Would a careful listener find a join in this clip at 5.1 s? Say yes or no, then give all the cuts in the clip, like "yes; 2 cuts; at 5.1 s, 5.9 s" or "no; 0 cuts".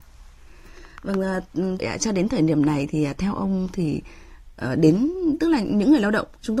no; 1 cut; at 1.8 s